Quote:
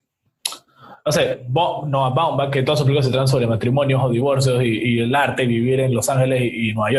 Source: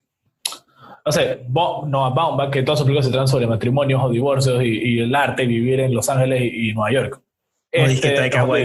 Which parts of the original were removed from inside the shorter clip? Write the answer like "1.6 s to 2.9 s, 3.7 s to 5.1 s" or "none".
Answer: none